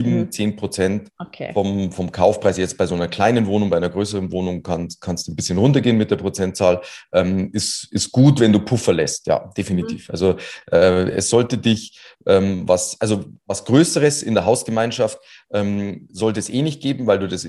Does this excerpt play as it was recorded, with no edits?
yes; 0 cuts

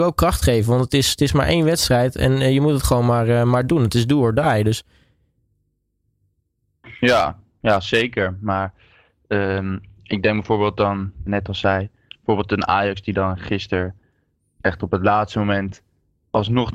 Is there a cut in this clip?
yes; 1 cut; at 11.3 s

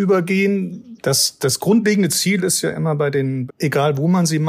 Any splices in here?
yes; 2 cuts; at 1.0 s, 3.5 s

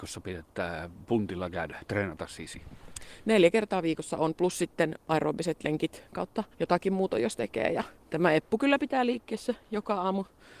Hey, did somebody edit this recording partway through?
yes; 1 cut; at 6.5 s

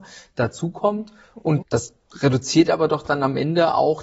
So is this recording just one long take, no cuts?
no; 1 cut; at 1.6 s

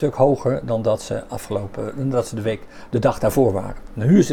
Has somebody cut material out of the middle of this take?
no; 0 cuts

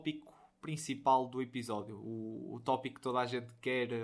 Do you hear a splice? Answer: no; 0 cuts

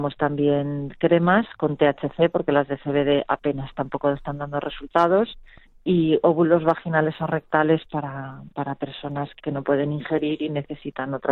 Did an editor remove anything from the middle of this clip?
yes; 1 cut; at 9.4 s

